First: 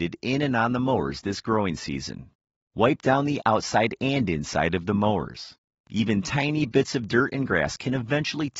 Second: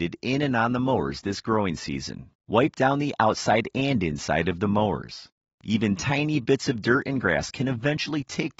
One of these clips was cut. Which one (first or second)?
second